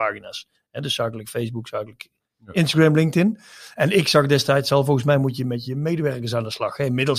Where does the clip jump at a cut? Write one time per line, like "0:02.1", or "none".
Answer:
none

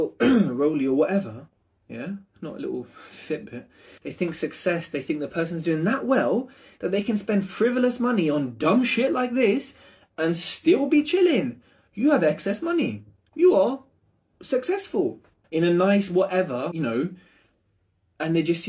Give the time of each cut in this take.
0:04.0
0:15.4
0:16.7

